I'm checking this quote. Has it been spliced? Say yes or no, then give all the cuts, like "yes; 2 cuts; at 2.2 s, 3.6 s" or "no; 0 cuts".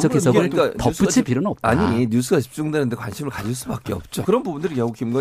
yes; 1 cut; at 4.2 s